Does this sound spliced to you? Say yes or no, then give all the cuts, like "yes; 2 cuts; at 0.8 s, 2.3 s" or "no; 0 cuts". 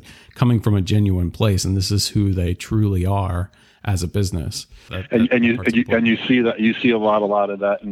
yes; 1 cut; at 4.9 s